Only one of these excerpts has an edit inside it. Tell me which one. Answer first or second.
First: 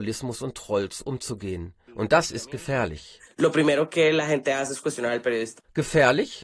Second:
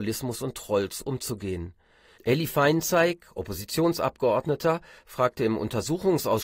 first